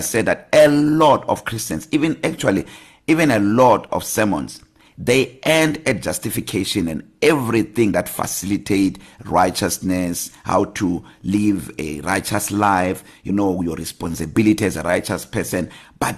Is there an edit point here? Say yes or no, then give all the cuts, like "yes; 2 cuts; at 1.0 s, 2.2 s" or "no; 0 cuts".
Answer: no; 0 cuts